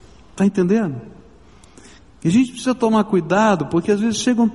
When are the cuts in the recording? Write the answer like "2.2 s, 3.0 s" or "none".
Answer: none